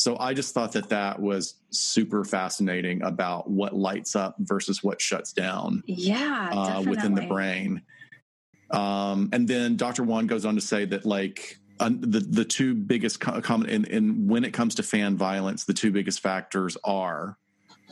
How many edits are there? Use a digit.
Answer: 1